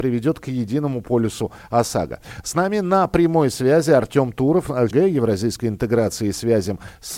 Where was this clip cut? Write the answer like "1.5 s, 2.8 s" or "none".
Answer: 4.9 s